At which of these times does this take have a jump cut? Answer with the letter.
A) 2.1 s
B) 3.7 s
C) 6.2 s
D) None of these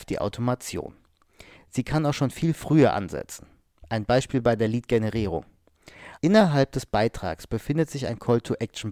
C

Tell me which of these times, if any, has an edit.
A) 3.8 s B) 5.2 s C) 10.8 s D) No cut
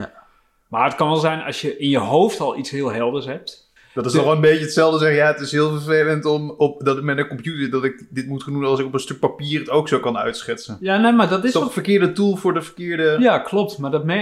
A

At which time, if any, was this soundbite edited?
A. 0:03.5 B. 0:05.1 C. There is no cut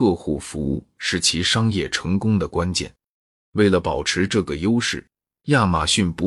A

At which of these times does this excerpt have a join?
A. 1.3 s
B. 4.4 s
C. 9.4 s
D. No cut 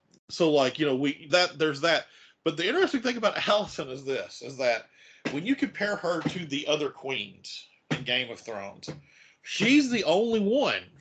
A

